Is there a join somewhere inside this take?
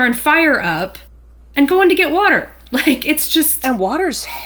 no; 0 cuts

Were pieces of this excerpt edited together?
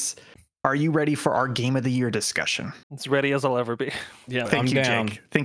yes; 2 cuts; at 2.8 s, 4.5 s

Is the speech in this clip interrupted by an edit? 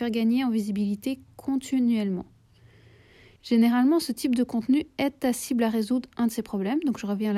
yes; 1 cut; at 3.4 s

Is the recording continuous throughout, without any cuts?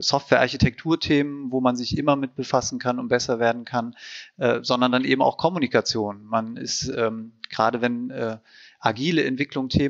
yes; 0 cuts

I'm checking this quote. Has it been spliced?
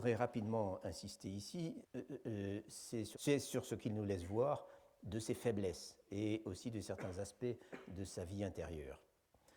yes; 2 cuts; at 1.8 s, 3.1 s

